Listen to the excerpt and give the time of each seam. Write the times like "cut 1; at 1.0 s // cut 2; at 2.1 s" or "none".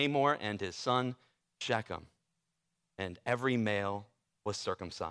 none